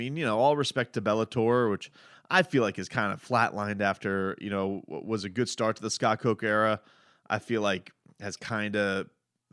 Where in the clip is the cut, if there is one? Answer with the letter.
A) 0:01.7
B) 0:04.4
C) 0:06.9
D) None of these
D